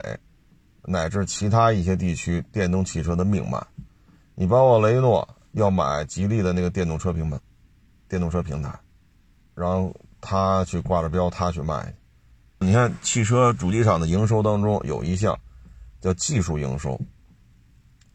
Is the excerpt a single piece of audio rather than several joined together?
no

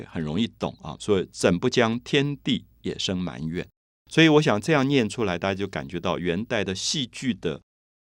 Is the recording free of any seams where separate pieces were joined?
no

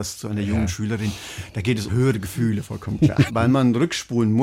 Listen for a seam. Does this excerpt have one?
yes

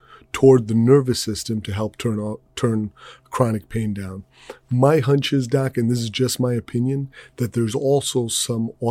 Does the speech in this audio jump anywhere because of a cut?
no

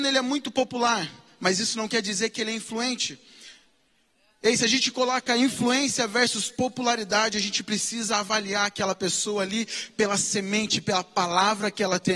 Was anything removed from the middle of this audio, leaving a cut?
no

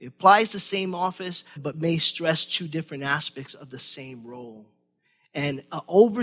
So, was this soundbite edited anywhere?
yes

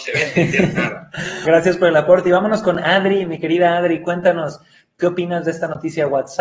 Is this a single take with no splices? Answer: no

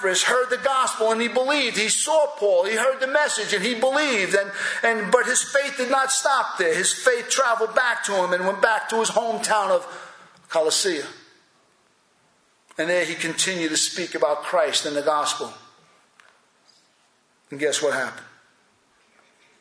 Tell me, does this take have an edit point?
no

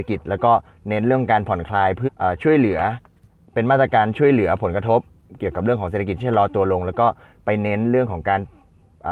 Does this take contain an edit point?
yes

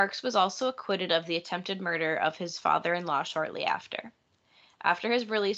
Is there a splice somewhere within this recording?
no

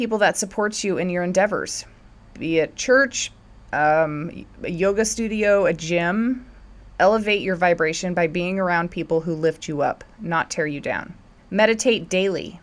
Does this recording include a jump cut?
no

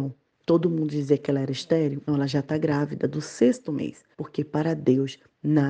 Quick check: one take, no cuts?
no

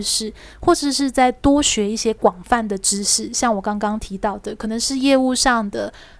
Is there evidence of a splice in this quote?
no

